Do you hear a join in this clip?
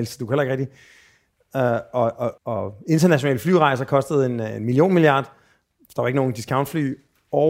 yes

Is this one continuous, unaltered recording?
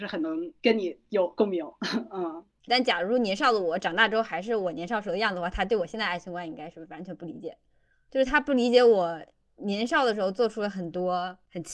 no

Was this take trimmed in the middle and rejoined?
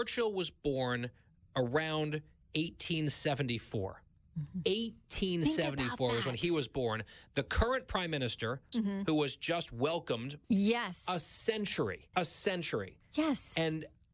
yes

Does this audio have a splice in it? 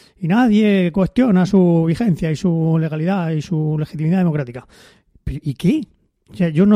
no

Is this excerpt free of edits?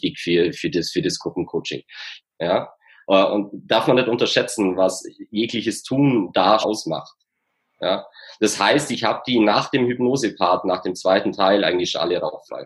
no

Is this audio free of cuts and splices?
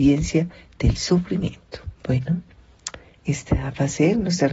no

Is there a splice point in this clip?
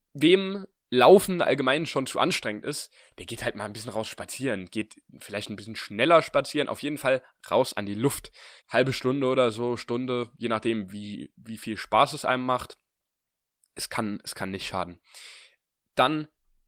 yes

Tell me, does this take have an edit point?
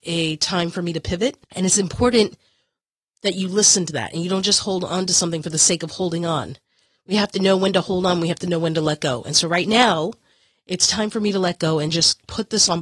yes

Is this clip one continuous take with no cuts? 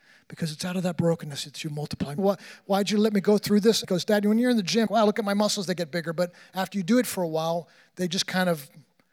no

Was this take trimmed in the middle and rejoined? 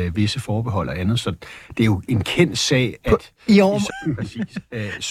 yes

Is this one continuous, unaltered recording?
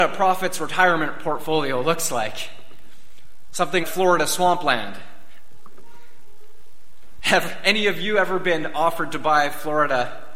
no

